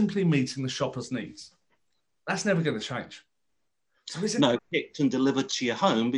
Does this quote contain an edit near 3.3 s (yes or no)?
no